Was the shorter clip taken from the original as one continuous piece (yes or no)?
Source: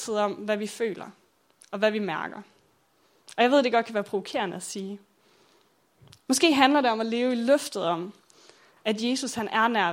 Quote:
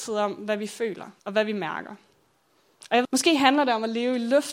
no